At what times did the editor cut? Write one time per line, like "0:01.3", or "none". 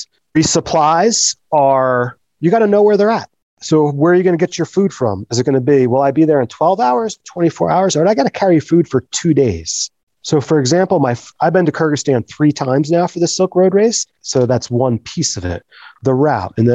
0:14.2